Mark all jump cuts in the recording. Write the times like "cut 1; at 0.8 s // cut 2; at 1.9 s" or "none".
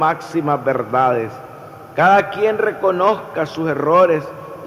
cut 1; at 1.9 s